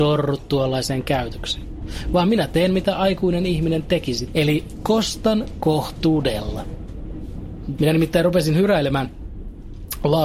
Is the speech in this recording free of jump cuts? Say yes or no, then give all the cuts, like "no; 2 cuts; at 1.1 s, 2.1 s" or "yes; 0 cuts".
no; 2 cuts; at 4.3 s, 7.8 s